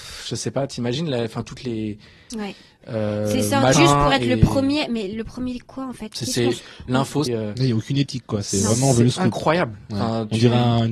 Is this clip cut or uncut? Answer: cut